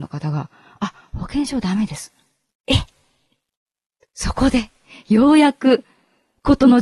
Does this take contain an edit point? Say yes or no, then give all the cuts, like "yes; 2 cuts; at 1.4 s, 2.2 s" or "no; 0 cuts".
yes; 1 cut; at 2.5 s